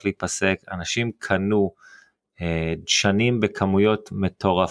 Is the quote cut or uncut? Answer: uncut